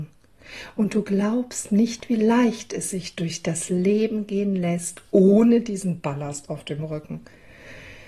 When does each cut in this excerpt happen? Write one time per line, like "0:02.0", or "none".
none